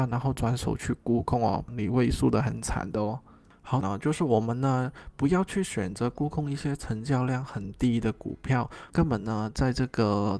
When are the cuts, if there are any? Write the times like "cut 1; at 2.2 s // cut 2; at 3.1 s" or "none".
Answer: cut 1; at 1.7 s // cut 2; at 3.8 s // cut 3; at 8.9 s